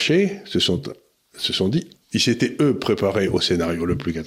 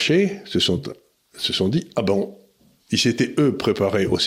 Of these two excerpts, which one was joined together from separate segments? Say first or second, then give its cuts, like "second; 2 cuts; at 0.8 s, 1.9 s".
first; 1 cut; at 1.9 s